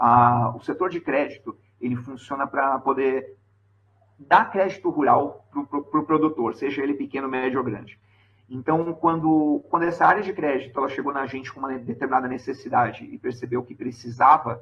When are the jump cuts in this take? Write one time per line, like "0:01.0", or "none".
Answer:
none